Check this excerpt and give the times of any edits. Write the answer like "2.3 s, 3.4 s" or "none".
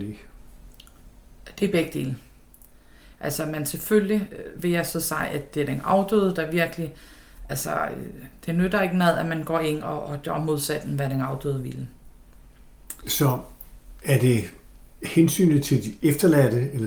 13.0 s

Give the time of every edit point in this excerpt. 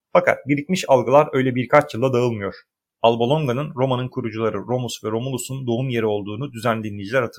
2.8 s

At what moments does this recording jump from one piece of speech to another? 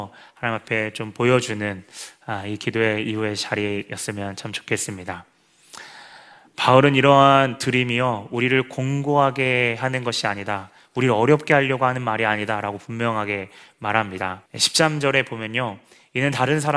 14.5 s

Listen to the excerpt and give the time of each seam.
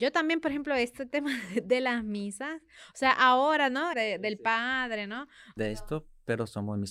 3.9 s, 5.6 s

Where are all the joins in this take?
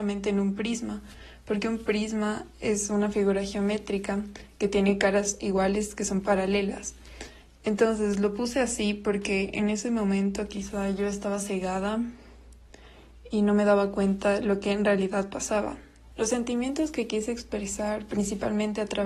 16.1 s

